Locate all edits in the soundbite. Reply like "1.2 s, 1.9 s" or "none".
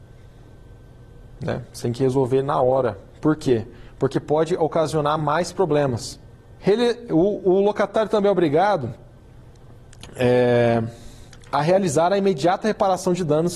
6.6 s